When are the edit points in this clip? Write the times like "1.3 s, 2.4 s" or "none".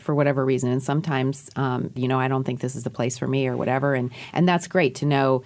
2.0 s